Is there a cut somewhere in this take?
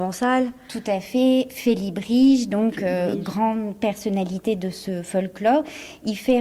no; 0 cuts

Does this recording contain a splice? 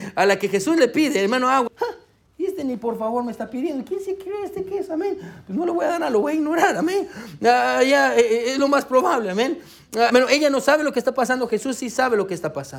yes; 2 cuts; at 1.7 s, 10.1 s

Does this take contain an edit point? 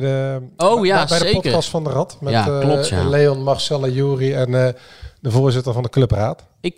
no; 0 cuts

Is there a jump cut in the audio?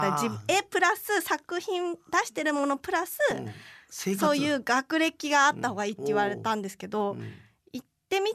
no; 0 cuts

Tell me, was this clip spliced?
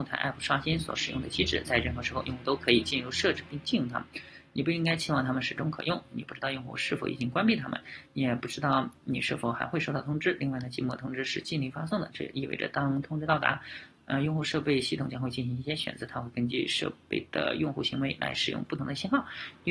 no; 0 cuts

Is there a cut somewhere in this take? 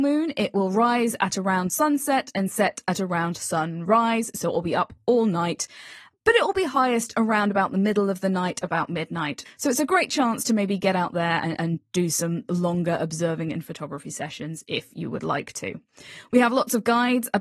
yes; 1 cut; at 9.5 s

